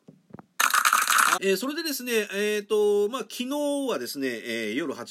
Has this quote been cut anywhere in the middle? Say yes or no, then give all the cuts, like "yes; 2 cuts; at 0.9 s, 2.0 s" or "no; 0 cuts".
yes; 1 cut; at 1.4 s